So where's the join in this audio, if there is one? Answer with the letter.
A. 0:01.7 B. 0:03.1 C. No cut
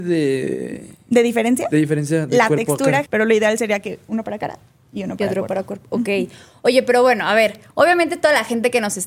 B